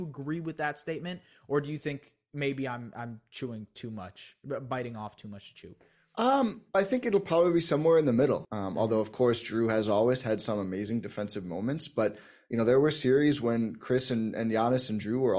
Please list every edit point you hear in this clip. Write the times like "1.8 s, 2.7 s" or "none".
6.7 s, 8.4 s

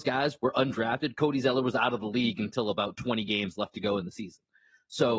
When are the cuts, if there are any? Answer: none

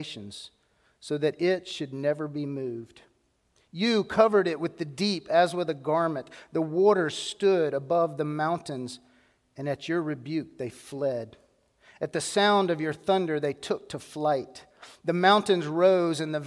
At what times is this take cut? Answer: none

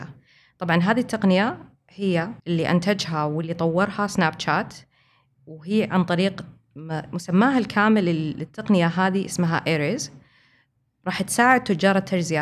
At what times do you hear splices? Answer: 2.4 s

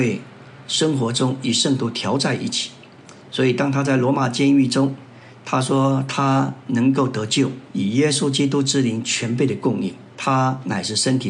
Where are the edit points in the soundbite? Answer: 7.7 s, 10.1 s

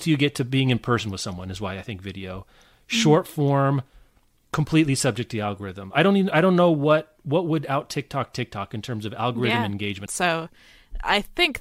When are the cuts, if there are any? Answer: 10.1 s

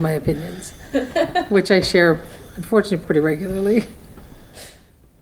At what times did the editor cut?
3.0 s

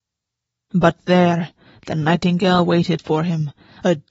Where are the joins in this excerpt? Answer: none

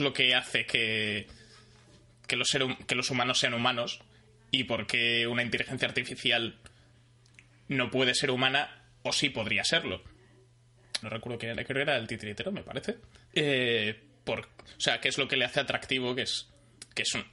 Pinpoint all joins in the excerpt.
11.0 s, 13.3 s

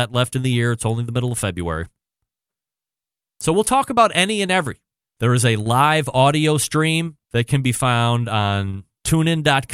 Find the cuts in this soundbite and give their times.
5.0 s, 7.2 s

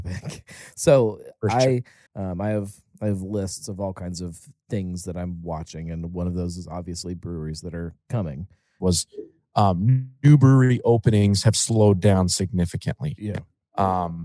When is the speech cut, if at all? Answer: 2.1 s, 8.8 s

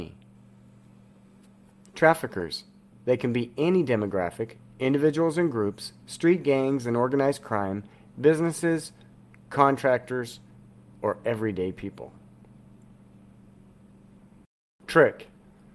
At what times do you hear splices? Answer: 2.9 s

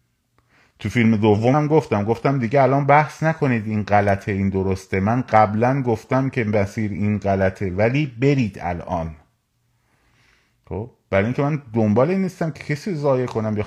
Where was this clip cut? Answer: 1.5 s

